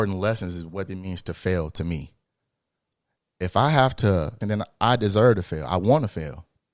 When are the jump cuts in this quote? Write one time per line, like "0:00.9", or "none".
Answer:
0:04.4